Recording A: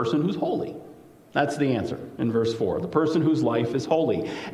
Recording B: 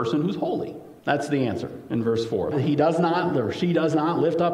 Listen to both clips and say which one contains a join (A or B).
B